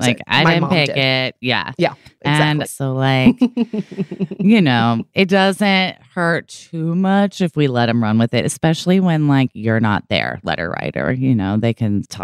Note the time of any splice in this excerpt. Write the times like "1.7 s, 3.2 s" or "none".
2.6 s